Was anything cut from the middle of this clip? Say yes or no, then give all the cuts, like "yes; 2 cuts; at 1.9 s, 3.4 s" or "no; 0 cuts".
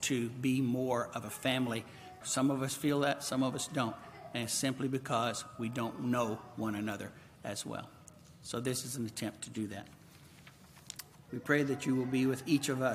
yes; 2 cuts; at 2.2 s, 11.3 s